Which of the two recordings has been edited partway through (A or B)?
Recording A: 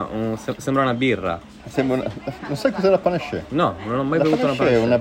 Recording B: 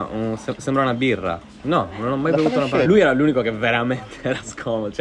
B